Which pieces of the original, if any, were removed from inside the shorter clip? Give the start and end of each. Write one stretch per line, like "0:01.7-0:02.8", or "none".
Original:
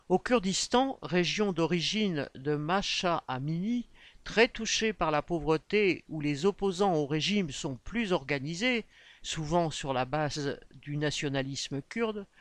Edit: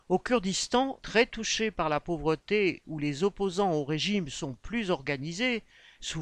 0:01.0-0:04.2

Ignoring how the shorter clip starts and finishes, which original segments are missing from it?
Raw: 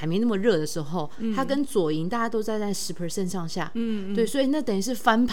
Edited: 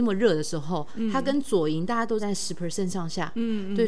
0:02.4-0:02.6

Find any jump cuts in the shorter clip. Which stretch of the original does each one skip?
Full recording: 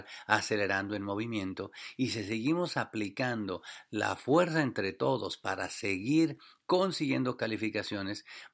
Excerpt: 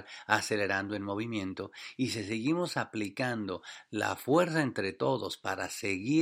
none

